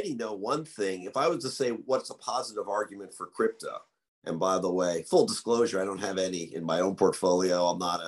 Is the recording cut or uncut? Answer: uncut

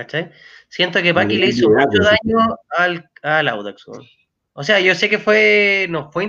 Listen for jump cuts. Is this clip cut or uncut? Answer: uncut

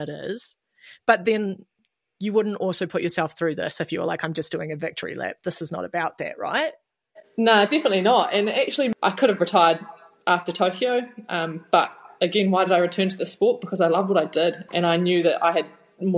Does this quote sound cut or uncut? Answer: uncut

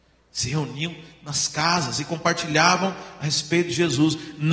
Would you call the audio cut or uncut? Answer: uncut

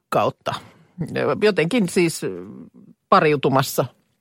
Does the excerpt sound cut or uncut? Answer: uncut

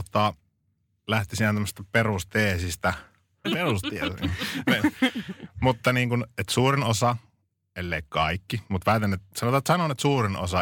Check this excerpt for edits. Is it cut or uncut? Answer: cut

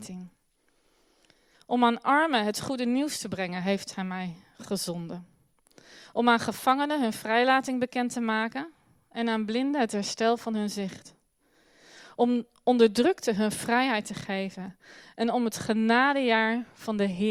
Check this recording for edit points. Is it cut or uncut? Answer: cut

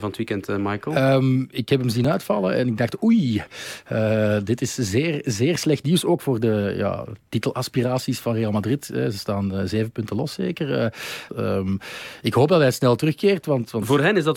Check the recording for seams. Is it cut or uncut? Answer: cut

